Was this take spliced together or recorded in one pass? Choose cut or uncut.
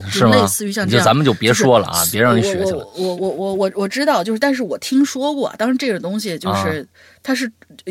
cut